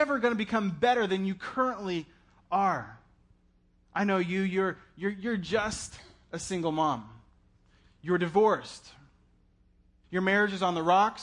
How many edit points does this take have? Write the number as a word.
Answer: one